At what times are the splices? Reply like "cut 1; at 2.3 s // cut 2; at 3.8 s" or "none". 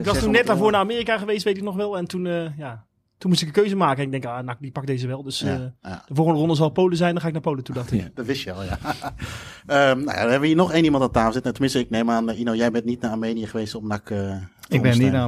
none